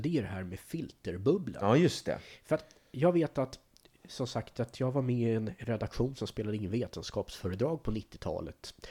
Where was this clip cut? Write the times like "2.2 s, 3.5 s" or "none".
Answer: none